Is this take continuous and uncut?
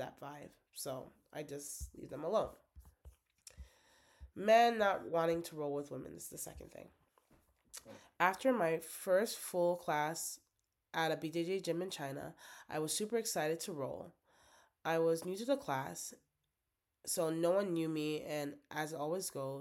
yes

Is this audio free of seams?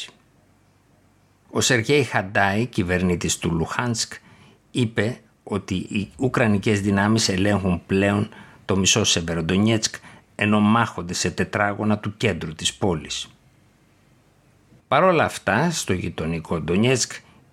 no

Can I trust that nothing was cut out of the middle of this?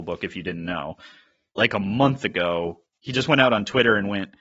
yes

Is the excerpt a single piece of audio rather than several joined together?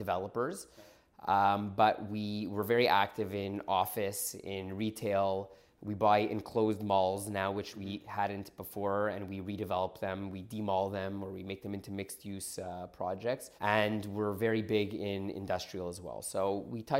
no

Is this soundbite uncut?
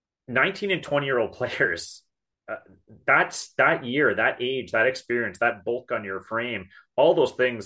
yes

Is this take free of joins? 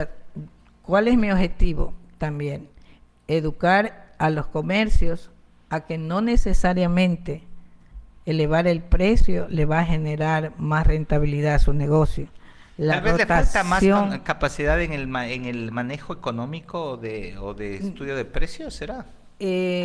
yes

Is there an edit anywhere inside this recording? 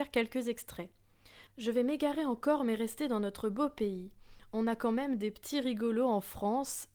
yes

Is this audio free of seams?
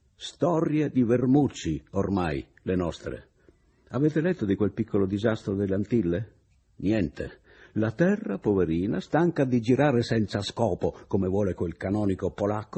yes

